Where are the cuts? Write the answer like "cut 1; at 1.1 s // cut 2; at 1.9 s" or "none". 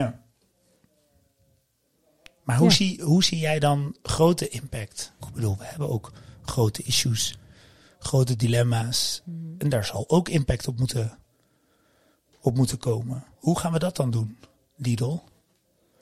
cut 1; at 5.2 s // cut 2; at 13.3 s